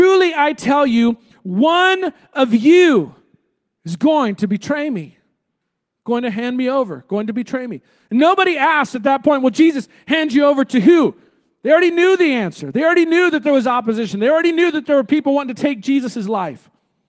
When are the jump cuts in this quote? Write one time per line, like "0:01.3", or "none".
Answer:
none

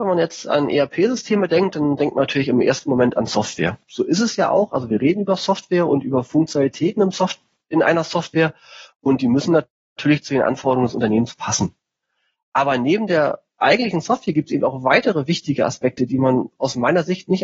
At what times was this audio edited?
none

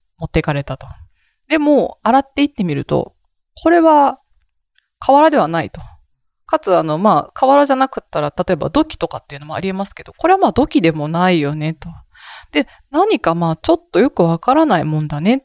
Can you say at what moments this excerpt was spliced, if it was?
none

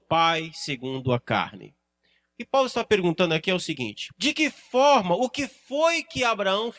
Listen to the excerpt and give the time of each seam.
0:04.1

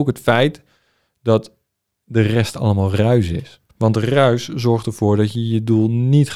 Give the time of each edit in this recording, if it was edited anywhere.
0:03.7

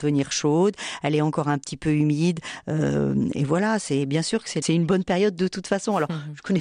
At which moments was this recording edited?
0:04.6

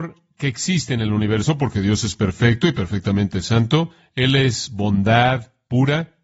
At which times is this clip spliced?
none

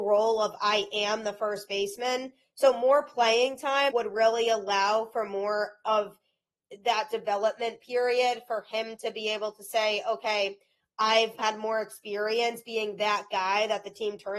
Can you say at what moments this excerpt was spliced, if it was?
0:03.9
0:11.4

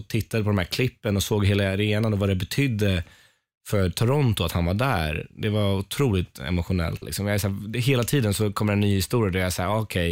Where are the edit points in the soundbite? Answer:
0:07.0

